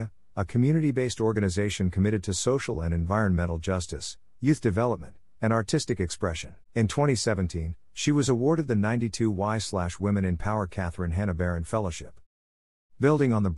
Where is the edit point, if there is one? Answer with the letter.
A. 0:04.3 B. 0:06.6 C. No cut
B